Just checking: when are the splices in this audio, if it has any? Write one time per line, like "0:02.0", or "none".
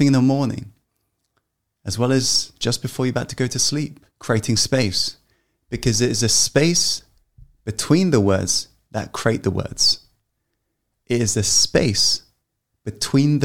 0:04.1